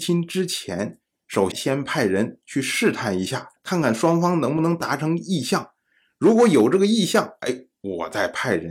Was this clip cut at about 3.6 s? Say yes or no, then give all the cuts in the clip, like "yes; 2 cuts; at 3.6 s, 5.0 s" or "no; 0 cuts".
yes; 2 cuts; at 1.5 s, 3.6 s